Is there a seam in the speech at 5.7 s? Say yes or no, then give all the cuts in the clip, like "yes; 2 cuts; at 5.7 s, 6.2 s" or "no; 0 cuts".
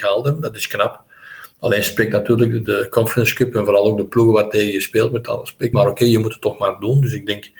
yes; 1 cut; at 5.7 s